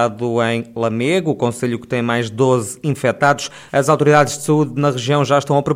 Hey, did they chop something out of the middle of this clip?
yes; 1 cut; at 3.7 s

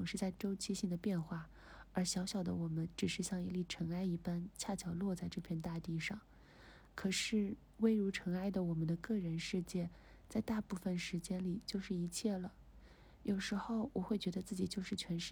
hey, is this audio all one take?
yes; 0 cuts

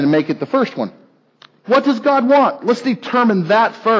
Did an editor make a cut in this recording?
no; 0 cuts

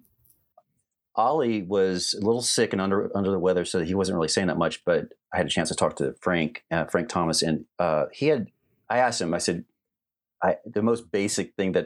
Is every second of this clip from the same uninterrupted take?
yes; 0 cuts

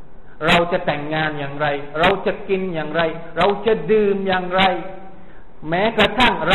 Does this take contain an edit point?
no; 0 cuts

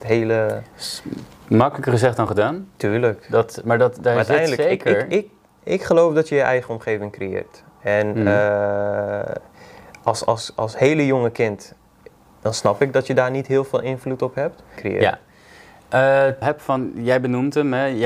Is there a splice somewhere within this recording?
yes; 2 cuts; at 14.8 s, 16.4 s

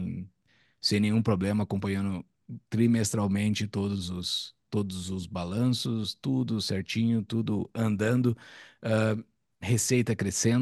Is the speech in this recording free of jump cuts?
yes; 0 cuts

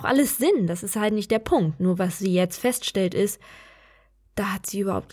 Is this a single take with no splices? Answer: yes; 0 cuts

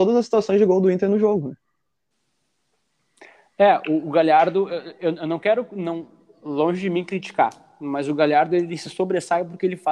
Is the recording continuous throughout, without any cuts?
yes; 0 cuts

